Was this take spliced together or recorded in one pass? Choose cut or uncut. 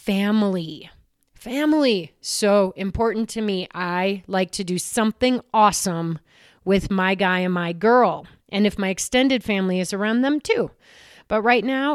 uncut